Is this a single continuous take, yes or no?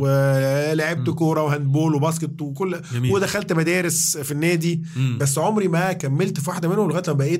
yes